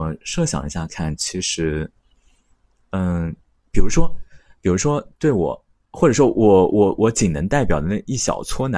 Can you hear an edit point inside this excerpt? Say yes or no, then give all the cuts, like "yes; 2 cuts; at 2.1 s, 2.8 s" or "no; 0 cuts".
yes; 1 cut; at 6.7 s